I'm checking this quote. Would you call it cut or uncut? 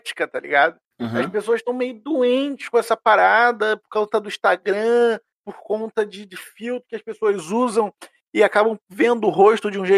uncut